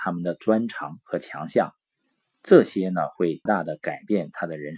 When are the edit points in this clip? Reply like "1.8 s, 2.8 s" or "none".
3.5 s